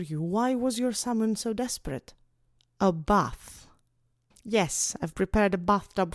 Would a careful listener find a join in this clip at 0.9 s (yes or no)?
no